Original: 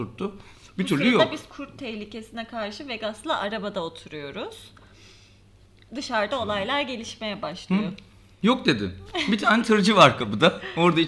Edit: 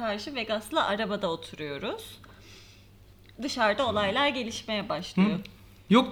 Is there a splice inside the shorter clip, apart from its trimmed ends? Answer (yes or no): no